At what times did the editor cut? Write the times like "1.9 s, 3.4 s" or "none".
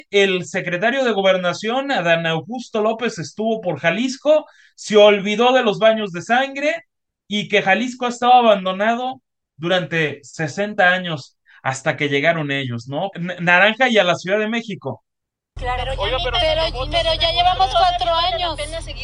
13.1 s, 15.6 s